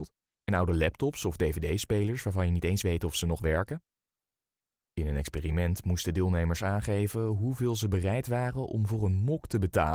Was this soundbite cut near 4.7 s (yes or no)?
yes